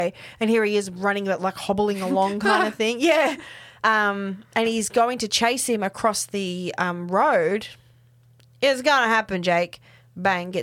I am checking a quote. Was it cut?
no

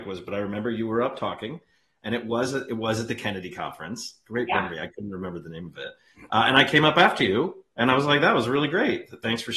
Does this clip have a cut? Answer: no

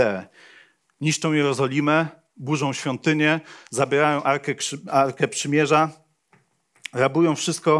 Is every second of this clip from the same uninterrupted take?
yes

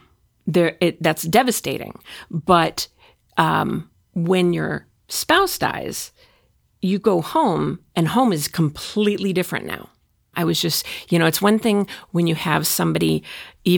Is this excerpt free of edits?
no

